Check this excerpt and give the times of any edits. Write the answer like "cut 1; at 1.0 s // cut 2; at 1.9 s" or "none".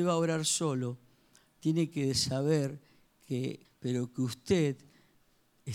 cut 1; at 3.6 s